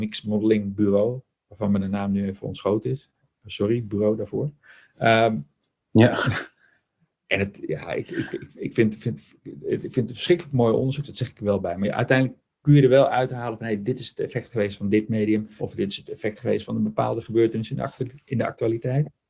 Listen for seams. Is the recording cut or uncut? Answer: cut